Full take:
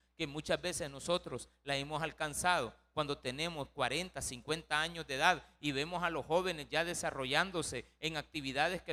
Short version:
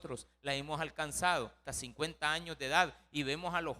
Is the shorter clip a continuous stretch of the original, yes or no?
no